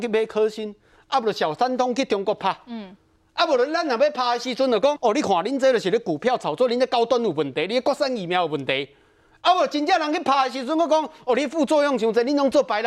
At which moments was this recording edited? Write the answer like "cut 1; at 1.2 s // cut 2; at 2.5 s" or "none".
cut 1; at 5.0 s